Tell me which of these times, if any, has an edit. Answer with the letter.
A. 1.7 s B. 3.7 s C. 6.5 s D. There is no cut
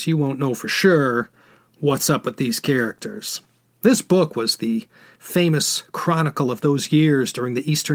D